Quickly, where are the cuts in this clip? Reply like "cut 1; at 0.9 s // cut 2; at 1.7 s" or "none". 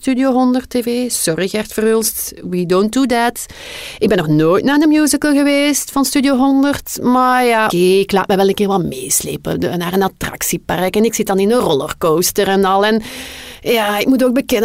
cut 1; at 7.7 s